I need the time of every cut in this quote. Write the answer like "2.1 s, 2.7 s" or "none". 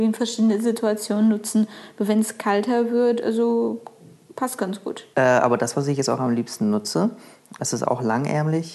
5.1 s, 7.6 s

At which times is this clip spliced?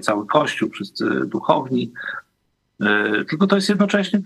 none

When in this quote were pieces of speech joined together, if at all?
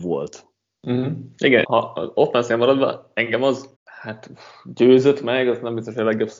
1.6 s, 3.7 s

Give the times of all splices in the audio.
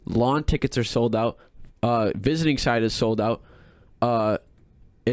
none

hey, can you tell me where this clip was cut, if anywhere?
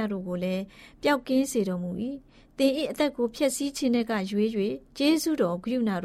4.9 s

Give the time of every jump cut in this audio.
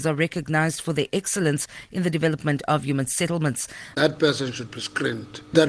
3.9 s

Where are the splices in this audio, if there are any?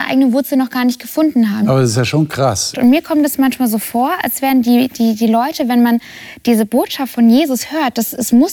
1.6 s, 2.7 s

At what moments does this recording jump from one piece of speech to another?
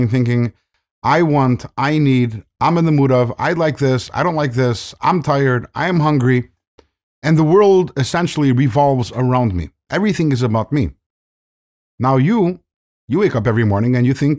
none

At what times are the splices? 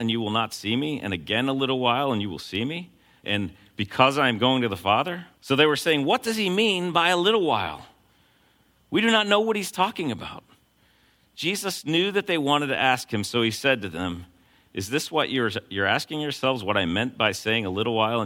5.3 s

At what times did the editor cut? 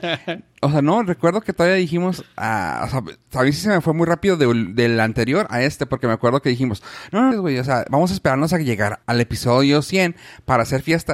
7.3 s, 9.0 s

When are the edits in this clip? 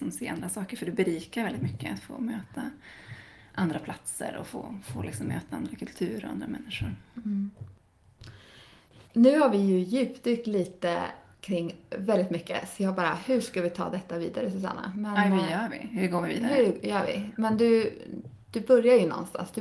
none

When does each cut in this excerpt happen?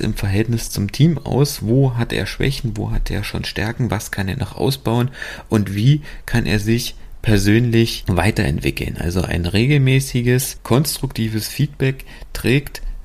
none

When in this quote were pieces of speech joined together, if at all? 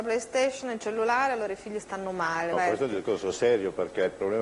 2.5 s

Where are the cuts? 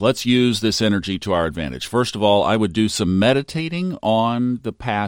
none

